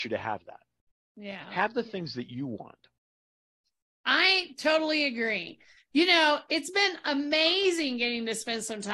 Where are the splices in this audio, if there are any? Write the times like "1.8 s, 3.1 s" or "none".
none